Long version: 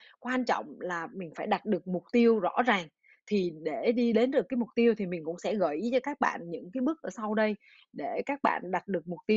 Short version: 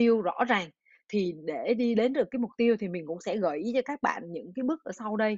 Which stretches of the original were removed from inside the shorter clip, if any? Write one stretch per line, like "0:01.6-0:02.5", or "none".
none